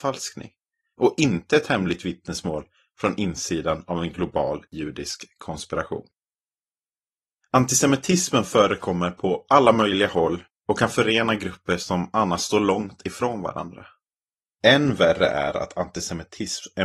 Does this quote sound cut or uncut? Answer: cut